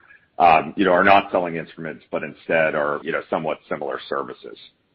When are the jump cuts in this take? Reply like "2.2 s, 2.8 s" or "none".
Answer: 3.0 s